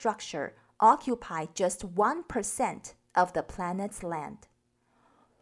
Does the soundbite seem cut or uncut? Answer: uncut